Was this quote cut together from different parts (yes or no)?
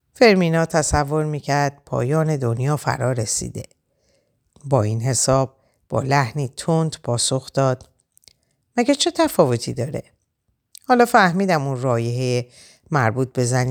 no